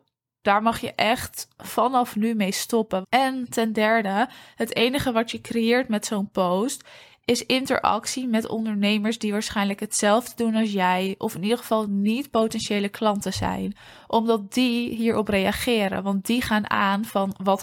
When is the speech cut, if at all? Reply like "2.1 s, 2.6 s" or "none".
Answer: 3.0 s

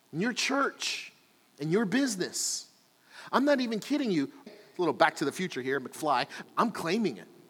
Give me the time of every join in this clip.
4.5 s, 6.4 s

